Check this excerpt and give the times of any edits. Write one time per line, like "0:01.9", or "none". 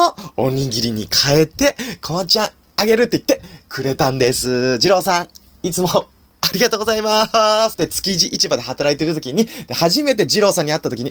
0:07.7

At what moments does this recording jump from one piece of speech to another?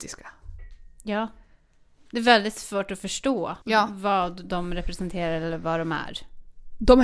0:03.6

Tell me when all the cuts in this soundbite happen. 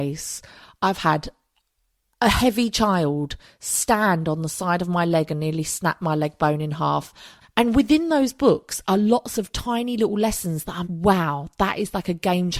0:07.4
0:10.8

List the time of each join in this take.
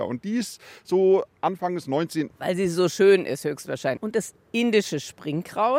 0:02.3
0:04.0

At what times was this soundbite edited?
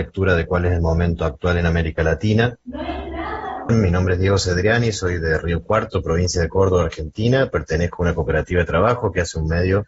0:03.7

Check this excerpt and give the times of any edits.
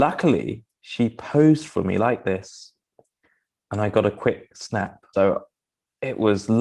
0:05.1

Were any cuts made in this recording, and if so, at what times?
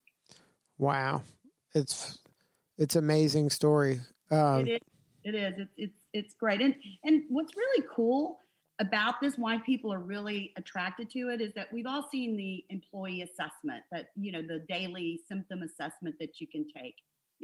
none

